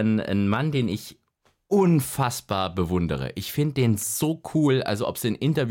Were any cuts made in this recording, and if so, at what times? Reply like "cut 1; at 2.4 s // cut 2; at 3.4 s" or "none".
none